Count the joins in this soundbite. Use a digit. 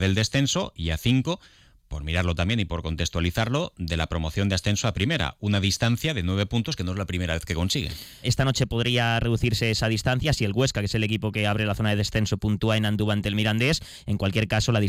1